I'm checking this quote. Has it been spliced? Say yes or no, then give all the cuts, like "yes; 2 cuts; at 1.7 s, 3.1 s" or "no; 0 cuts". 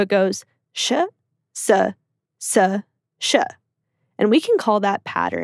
no; 0 cuts